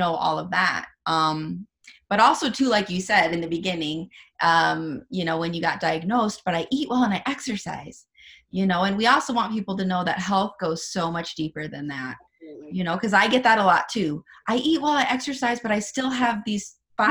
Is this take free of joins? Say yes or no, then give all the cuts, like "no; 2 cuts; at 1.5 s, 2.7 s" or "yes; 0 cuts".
yes; 0 cuts